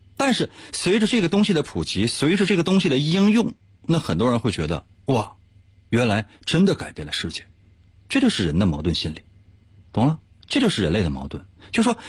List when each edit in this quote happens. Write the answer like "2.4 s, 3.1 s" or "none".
10.3 s

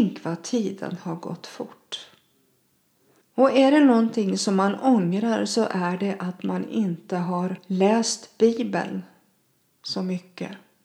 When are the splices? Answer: 3.2 s

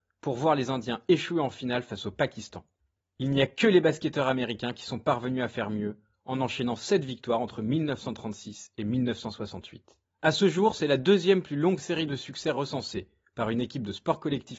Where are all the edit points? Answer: 3.0 s, 10.0 s

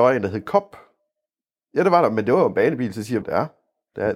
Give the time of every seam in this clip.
1.6 s, 3.2 s

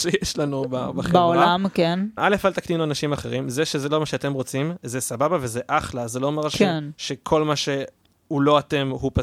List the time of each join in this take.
2.2 s

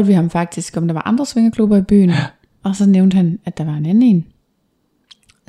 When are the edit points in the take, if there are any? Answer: none

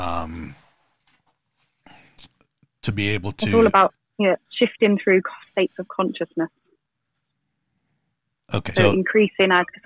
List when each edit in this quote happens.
4.5 s, 8.8 s

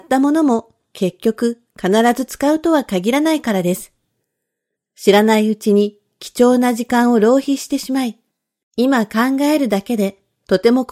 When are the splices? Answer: 4.8 s

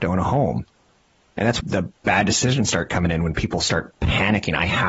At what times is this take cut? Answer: 1.6 s

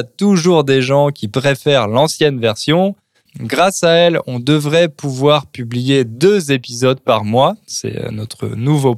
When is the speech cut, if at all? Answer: 3.3 s

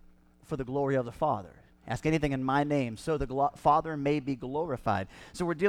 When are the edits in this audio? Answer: none

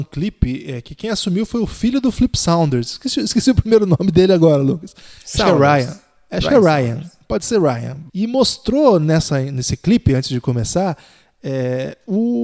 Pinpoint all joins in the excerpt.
8.1 s

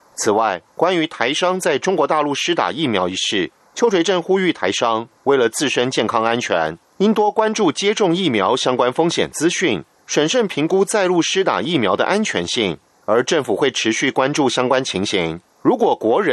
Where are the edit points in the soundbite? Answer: none

